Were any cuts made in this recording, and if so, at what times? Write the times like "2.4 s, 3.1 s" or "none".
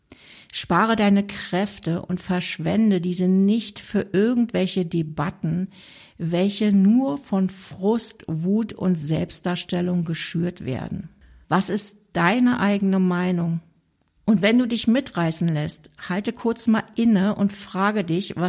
11.4 s, 14.2 s

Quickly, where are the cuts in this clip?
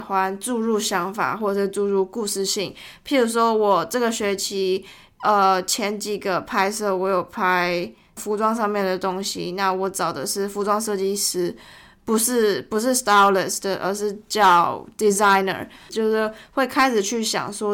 8.2 s, 15.9 s

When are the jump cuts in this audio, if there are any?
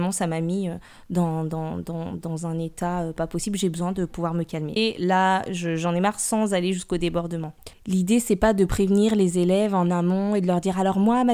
4.8 s

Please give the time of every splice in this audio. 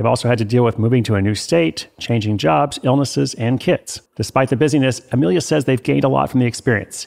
4.1 s

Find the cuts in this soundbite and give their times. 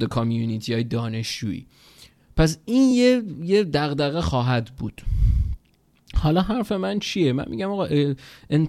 none

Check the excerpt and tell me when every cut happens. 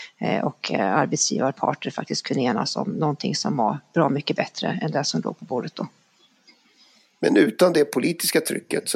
none

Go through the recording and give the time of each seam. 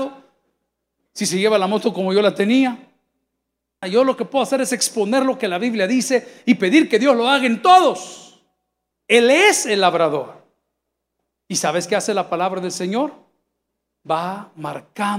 3.8 s, 8.9 s

